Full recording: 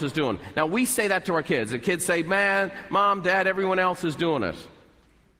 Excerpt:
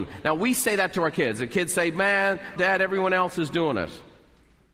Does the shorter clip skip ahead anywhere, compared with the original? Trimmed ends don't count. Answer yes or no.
yes